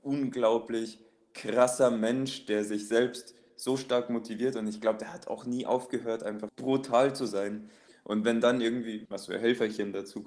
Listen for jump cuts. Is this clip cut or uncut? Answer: cut